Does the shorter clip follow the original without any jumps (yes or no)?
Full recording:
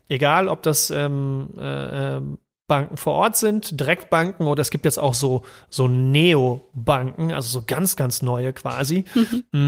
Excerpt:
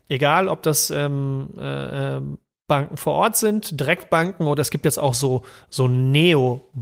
yes